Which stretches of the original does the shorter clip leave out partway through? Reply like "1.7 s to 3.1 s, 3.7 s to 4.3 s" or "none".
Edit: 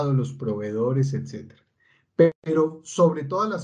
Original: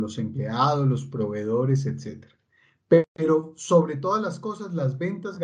none